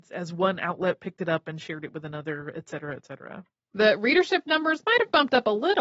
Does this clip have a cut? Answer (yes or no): yes